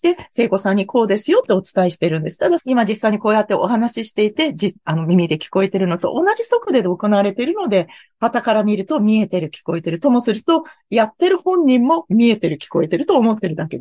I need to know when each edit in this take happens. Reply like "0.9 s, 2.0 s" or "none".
2.6 s